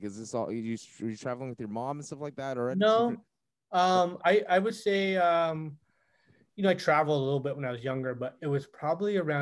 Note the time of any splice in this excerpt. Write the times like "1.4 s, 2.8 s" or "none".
8.4 s

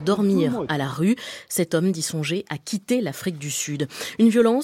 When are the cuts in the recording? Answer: none

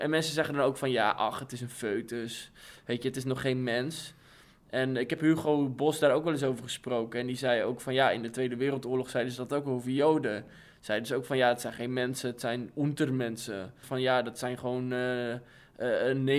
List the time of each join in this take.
13.8 s

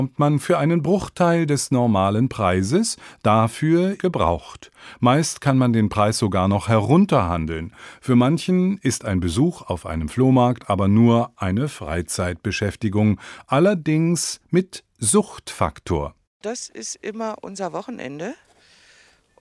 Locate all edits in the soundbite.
4.0 s

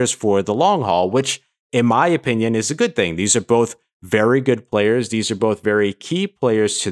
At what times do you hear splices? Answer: none

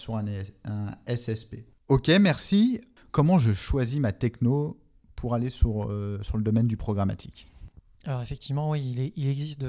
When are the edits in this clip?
1.8 s

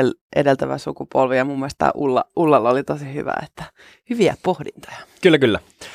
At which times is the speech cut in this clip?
none

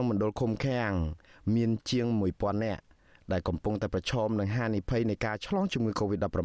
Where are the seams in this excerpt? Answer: none

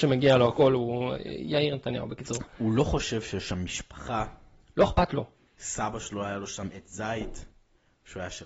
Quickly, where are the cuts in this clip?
5.5 s

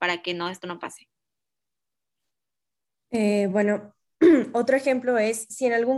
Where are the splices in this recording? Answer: none

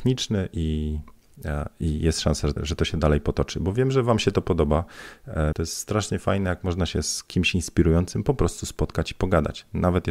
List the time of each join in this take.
2.6 s, 5.5 s

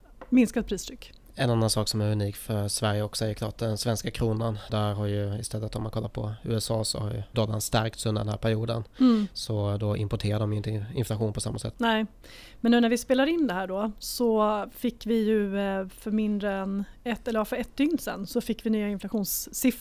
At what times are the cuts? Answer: 4.7 s, 7.3 s

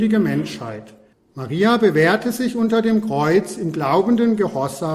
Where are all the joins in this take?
1.1 s

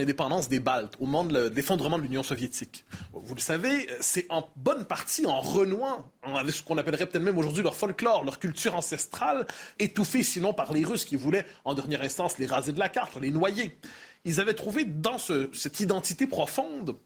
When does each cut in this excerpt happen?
9.8 s, 13.1 s

